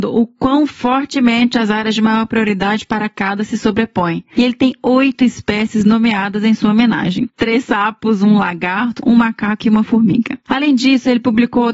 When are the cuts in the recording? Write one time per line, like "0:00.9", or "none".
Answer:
0:04.3
0:09.0